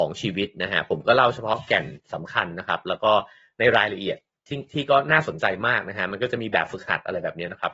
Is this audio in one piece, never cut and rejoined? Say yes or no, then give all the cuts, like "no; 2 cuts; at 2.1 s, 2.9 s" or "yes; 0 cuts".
yes; 0 cuts